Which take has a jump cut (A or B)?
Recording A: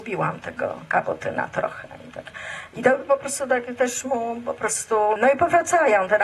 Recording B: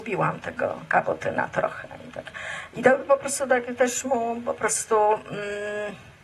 A